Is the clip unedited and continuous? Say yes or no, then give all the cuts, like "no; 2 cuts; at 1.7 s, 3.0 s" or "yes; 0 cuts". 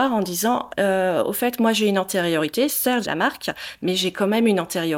no; 1 cut; at 3.0 s